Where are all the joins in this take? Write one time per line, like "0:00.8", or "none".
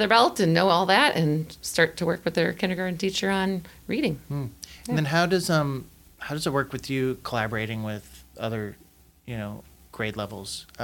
none